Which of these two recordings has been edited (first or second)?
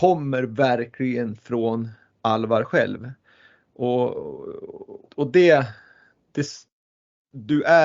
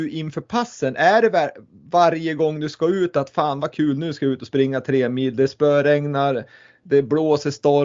first